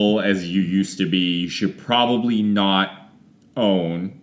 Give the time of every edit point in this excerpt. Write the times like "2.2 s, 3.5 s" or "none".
none